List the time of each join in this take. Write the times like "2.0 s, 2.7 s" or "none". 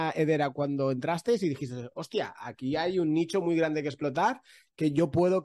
none